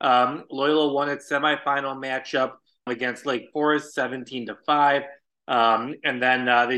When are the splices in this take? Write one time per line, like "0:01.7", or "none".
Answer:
0:02.9